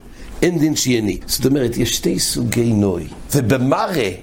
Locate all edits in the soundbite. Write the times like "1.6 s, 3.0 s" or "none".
1.2 s, 3.3 s

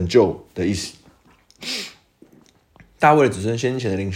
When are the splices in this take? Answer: 1.6 s

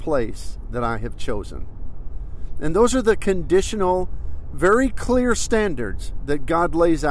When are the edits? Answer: none

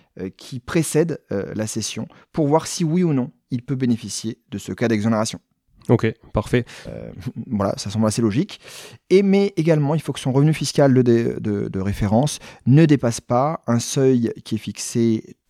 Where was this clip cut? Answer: 6.9 s

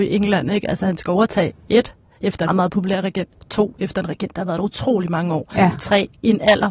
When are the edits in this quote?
2.5 s

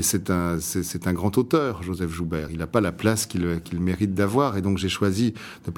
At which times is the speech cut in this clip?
none

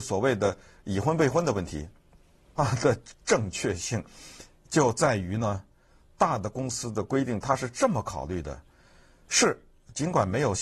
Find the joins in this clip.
2.6 s

